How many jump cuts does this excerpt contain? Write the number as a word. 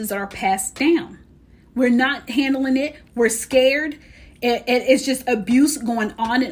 one